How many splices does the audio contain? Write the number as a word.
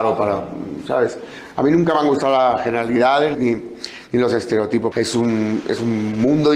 two